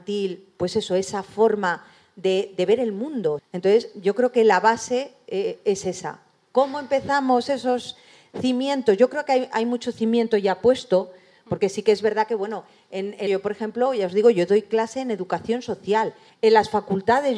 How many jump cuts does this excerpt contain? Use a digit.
3